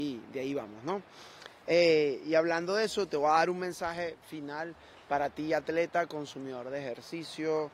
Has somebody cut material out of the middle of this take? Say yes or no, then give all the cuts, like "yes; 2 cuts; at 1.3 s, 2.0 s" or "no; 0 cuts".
no; 0 cuts